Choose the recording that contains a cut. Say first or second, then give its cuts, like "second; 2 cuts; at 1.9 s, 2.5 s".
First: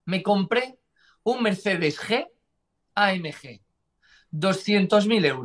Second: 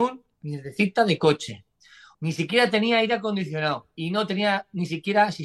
second; 1 cut; at 2.1 s